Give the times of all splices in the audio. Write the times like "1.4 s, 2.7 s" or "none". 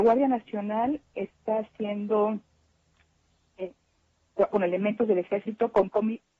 4.5 s